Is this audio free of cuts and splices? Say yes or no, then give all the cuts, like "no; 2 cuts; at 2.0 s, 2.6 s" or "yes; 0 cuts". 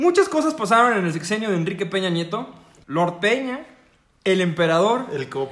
no; 1 cut; at 2.8 s